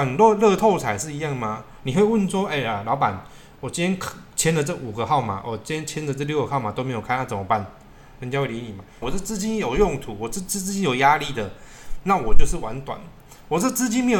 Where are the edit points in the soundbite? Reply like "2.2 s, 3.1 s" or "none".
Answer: 9.0 s